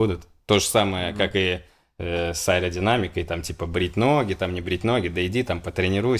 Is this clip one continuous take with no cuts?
yes; 0 cuts

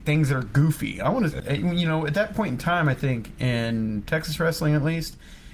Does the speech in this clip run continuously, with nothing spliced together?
no; 1 cut; at 1.4 s

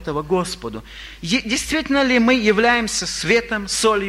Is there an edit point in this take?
no; 0 cuts

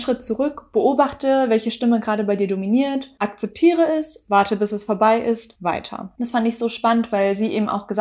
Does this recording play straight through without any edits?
yes; 0 cuts

